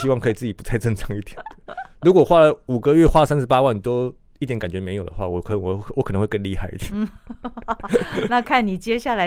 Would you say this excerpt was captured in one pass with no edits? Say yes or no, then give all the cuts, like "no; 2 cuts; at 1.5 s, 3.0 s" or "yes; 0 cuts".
yes; 0 cuts